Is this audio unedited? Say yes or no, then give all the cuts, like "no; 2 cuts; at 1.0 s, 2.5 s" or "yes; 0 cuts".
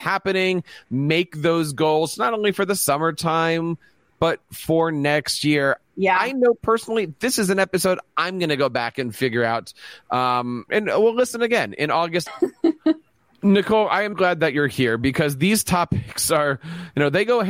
no; 3 cuts; at 10.7 s, 12.3 s, 14.1 s